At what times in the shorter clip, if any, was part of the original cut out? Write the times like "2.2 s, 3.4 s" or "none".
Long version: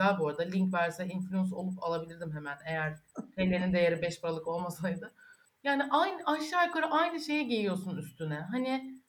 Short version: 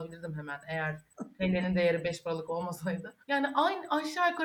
3.2 s